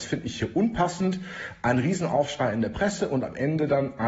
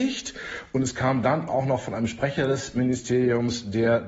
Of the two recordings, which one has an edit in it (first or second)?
second